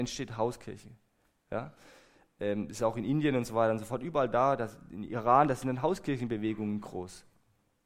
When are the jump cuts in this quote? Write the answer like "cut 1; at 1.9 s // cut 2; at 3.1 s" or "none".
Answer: none